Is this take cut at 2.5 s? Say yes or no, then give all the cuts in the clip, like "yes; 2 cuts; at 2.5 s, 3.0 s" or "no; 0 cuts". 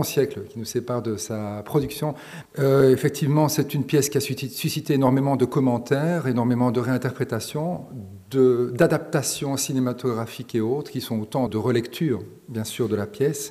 yes; 2 cuts; at 2.5 s, 11.5 s